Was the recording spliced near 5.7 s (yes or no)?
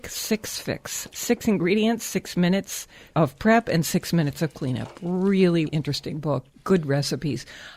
yes